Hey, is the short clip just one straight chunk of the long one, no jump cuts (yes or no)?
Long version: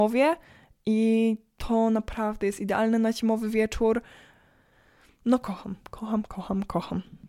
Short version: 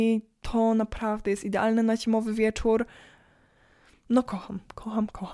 yes